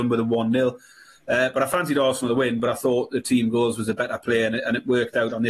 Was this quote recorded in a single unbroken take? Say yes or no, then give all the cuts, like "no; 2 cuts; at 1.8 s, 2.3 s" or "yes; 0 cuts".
yes; 0 cuts